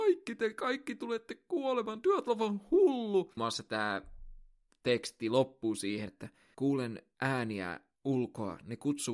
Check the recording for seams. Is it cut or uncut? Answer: cut